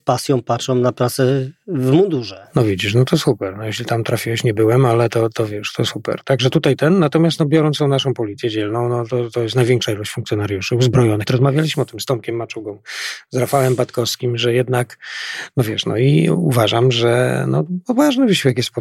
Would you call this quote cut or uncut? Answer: cut